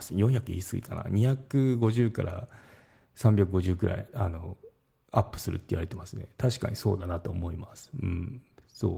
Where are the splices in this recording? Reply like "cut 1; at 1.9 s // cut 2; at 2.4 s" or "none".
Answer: none